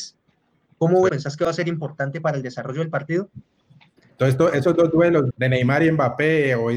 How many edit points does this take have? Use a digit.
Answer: 3